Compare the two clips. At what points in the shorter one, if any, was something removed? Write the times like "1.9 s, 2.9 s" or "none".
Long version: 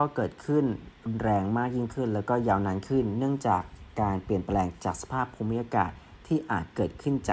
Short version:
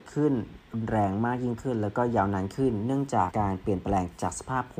3.3 s